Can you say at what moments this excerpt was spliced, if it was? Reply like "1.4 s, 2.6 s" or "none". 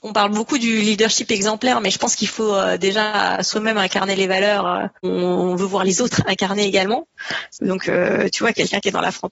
none